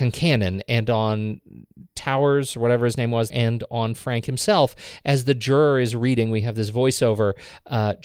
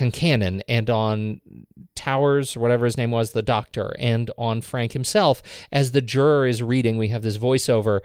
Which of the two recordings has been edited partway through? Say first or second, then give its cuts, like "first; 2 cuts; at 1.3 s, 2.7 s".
first; 1 cut; at 3.3 s